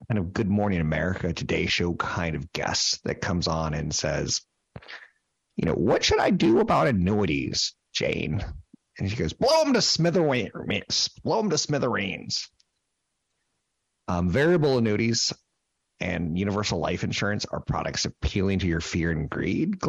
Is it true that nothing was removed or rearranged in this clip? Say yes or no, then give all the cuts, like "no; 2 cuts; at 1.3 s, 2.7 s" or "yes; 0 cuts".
yes; 0 cuts